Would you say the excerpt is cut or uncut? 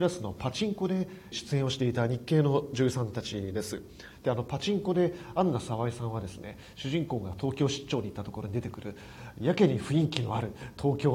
cut